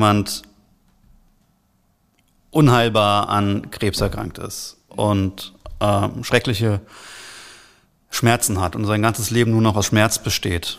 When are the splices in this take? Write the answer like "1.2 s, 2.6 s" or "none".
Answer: none